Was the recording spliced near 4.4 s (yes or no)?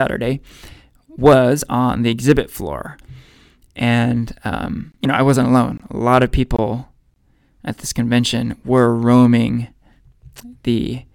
no